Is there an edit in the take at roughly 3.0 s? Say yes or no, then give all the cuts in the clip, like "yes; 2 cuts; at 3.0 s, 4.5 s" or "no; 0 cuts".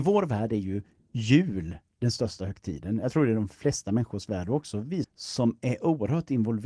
no; 1 cut; at 5.0 s